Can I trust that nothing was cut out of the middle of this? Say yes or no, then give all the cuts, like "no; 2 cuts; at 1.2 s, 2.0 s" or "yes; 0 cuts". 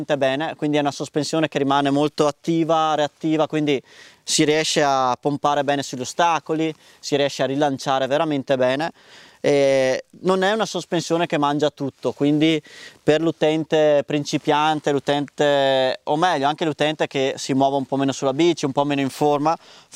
yes; 0 cuts